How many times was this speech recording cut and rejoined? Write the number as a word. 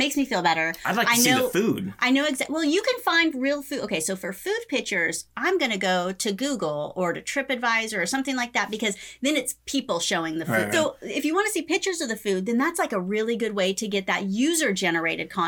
one